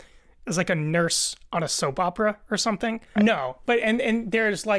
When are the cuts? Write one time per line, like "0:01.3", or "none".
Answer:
0:03.2